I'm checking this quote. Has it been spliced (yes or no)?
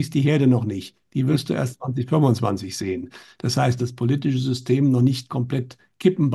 yes